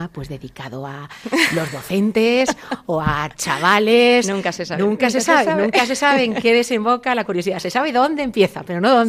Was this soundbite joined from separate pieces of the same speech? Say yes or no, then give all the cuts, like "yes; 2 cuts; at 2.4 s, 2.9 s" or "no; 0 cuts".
no; 0 cuts